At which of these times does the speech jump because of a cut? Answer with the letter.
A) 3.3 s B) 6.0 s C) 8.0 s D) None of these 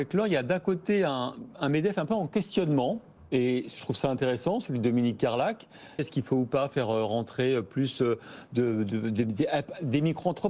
B